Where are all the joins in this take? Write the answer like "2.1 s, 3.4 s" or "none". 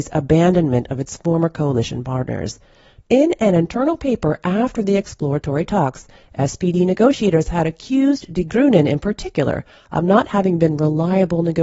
3.0 s